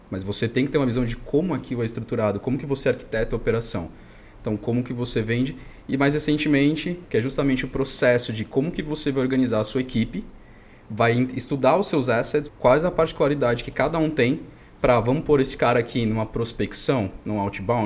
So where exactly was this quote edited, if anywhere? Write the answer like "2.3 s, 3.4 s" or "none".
4.2 s, 7.1 s, 12.5 s